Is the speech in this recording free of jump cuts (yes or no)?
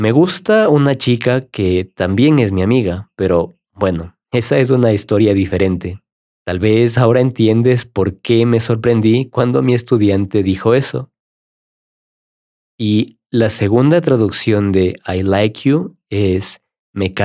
no